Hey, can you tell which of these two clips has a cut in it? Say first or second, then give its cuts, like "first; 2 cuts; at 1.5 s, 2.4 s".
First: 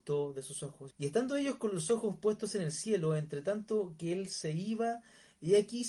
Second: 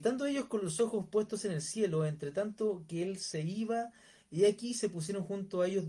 first; 1 cut; at 0.9 s